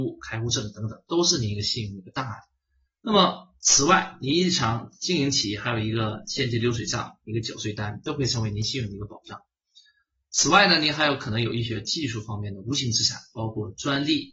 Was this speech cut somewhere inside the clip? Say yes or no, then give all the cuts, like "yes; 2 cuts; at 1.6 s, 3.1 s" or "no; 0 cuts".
no; 0 cuts